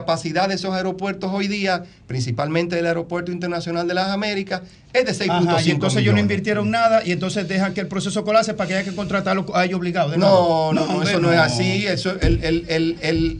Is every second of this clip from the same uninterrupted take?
yes; 0 cuts

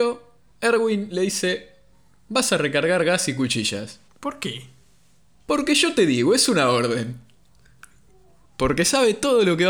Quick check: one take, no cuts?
no; 2 cuts; at 4.1 s, 8.4 s

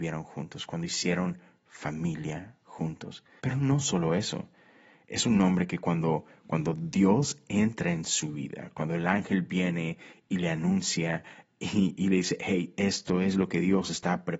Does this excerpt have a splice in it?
yes; 1 cut; at 3.4 s

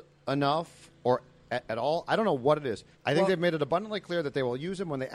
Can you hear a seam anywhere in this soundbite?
yes; 1 cut; at 2.9 s

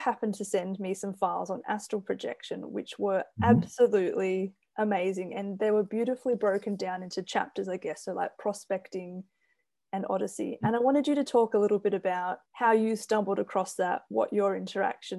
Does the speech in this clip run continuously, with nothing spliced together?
no; 1 cut; at 12.5 s

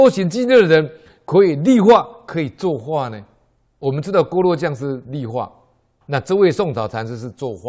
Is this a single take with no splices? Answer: no; 1 cut; at 6.0 s

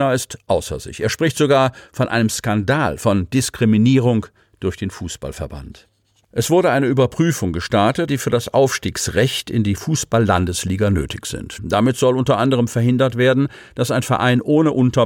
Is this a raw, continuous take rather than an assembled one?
no; 2 cuts; at 8.1 s, 11.6 s

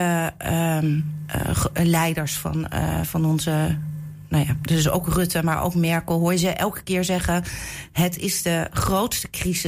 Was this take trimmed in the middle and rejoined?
no; 0 cuts

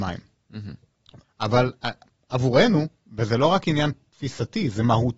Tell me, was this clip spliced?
yes; 1 cut; at 1.2 s

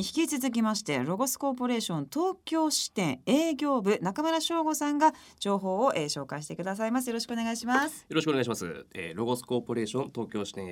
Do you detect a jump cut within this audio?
no; 0 cuts

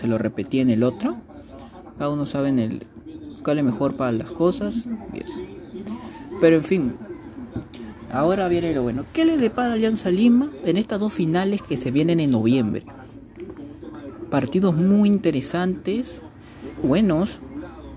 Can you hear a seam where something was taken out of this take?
yes; 1 cut; at 16.8 s

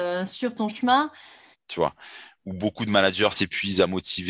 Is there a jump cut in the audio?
yes; 1 cut; at 1.5 s

